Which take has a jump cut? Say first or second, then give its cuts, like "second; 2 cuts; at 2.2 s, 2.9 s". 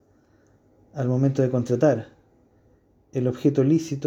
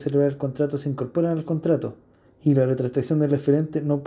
second; 1 cut; at 2.3 s